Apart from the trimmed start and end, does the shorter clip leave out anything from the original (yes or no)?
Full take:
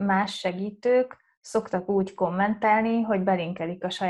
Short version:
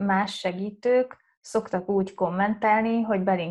no